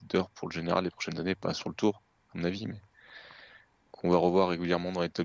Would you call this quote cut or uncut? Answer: uncut